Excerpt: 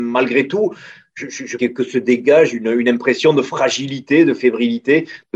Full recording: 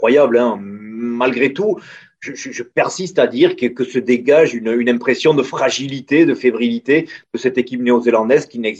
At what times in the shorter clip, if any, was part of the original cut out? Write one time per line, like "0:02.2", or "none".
0:01.6